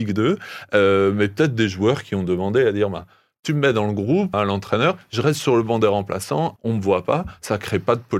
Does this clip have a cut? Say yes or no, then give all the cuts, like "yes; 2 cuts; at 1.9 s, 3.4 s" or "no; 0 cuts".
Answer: yes; 2 cuts; at 4.3 s, 6.6 s